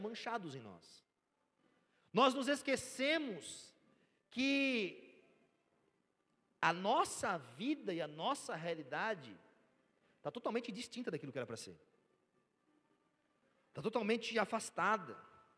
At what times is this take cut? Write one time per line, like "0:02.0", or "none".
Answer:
none